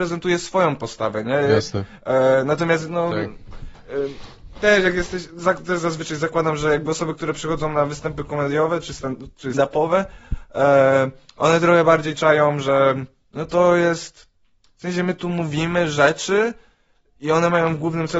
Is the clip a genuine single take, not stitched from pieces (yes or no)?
no